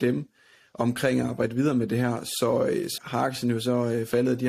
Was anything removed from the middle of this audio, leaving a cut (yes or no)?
yes